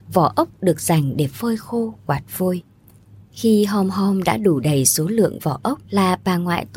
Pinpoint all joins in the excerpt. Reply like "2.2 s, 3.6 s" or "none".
5.9 s